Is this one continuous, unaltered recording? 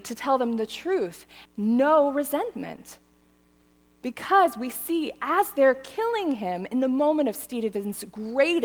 no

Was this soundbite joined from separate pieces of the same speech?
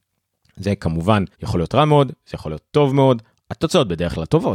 yes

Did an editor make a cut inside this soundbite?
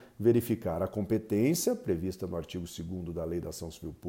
no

